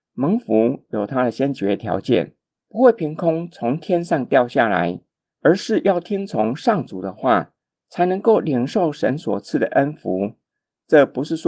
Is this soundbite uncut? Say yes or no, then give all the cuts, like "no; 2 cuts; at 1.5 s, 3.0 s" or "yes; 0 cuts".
no; 1 cut; at 7.8 s